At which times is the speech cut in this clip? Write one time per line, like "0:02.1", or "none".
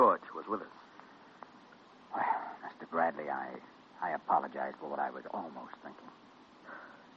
none